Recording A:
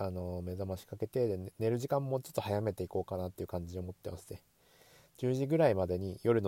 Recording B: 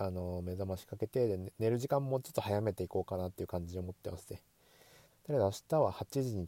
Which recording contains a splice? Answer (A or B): B